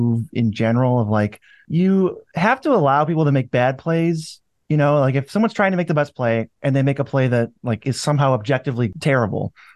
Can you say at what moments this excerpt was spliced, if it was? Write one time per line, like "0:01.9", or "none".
none